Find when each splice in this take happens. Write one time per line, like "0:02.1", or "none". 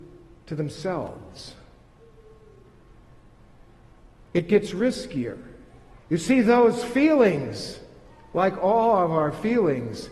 0:06.0